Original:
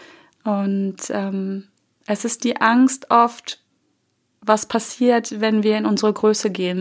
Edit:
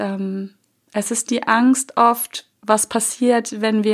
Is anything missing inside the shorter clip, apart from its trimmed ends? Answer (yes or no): yes